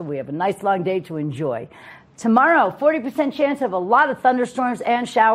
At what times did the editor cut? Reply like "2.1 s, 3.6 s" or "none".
none